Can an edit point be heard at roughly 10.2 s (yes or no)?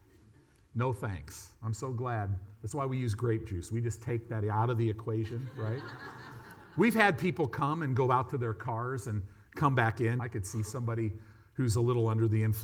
yes